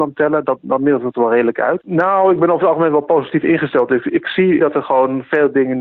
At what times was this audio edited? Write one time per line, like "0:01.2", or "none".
0:01.8
0:04.6

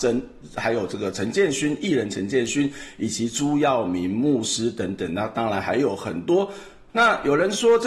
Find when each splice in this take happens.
0:06.9

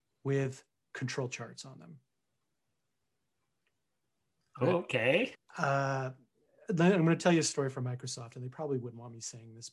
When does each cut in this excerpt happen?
0:05.3

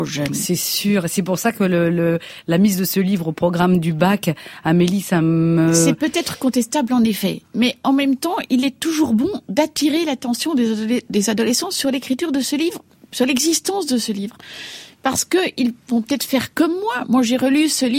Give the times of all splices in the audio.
none

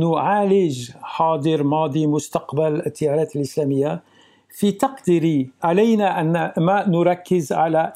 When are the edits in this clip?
none

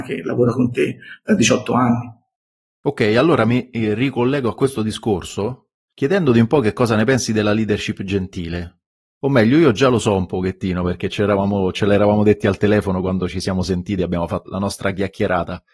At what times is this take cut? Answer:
0:14.5

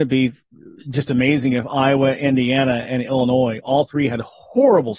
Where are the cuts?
none

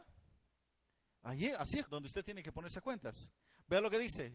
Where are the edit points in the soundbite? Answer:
0:01.9

